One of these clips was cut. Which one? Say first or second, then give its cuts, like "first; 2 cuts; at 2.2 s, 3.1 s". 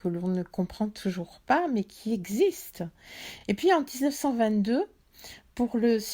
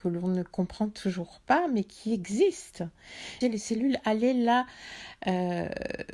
second; 1 cut; at 3.4 s